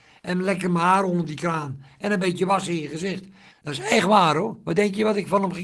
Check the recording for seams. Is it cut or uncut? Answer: cut